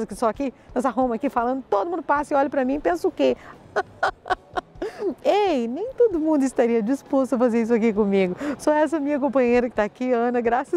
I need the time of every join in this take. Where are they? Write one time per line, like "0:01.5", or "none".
0:03.6